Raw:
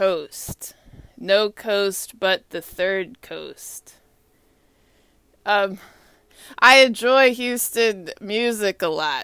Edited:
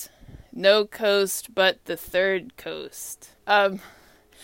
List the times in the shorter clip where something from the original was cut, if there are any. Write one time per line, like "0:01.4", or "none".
0:03.4